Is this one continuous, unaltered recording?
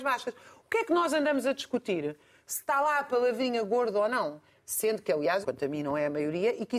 no; 1 cut; at 5.4 s

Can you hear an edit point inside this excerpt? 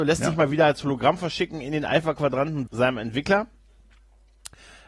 yes; 1 cut; at 2.7 s

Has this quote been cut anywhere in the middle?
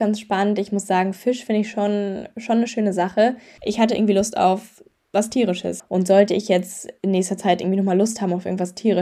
yes; 2 cuts; at 3.6 s, 5.8 s

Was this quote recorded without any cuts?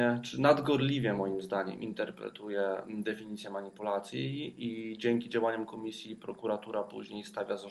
yes; 0 cuts

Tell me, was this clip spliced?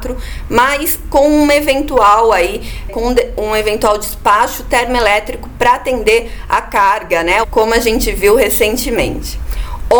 yes; 2 cuts; at 2.9 s, 7.4 s

